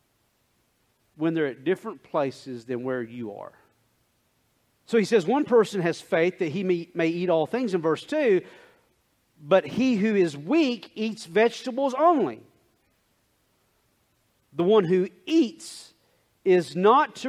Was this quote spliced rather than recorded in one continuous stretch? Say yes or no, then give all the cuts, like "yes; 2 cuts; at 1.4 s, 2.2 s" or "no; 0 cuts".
yes; 1 cut; at 4.7 s